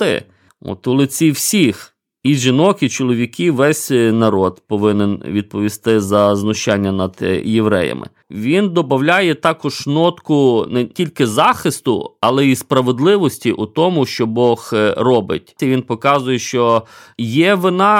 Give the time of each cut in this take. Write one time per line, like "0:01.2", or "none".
0:08.2
0:15.6